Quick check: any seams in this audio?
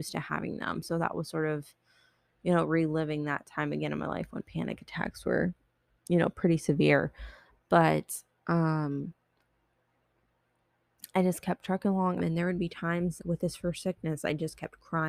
yes; 2 cuts; at 12.2 s, 13.2 s

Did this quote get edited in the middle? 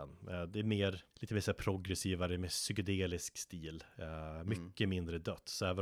yes; 1 cut; at 1.1 s

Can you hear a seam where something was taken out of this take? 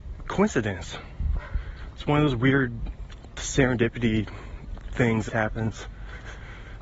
yes; 1 cut; at 5.3 s

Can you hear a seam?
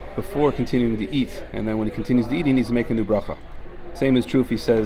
no; 0 cuts

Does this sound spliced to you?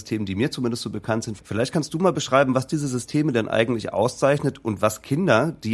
yes; 1 cut; at 1.4 s

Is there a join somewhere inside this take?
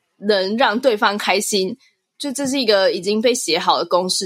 no; 0 cuts

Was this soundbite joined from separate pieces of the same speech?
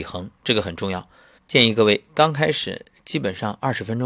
yes; 1 cut; at 1.4 s

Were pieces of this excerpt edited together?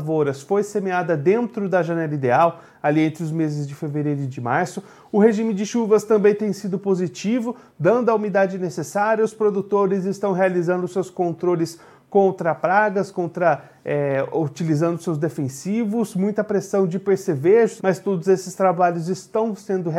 yes; 1 cut; at 17.8 s

